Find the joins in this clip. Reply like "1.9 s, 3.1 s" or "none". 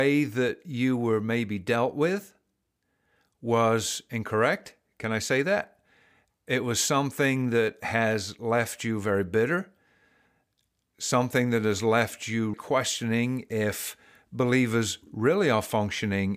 12.5 s